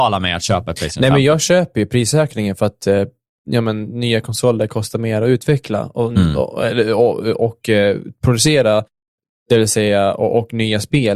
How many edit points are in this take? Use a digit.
0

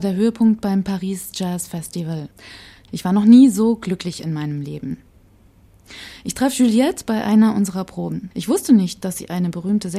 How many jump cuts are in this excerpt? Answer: 2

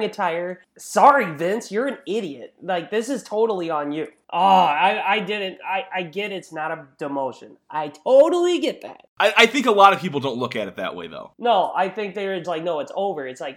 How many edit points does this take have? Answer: 1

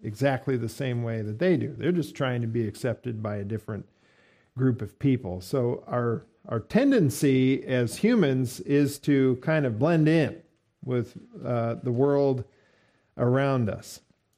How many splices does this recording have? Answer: 0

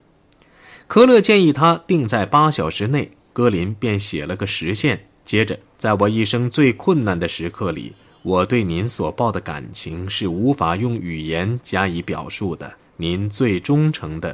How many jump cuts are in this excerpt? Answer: 2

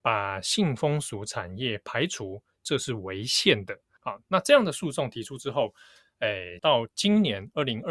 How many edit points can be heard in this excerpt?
2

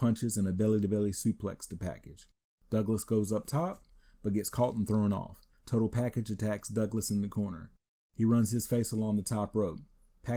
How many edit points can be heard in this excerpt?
1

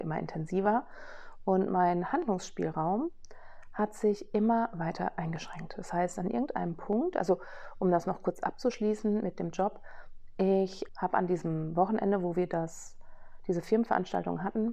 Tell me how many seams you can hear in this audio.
1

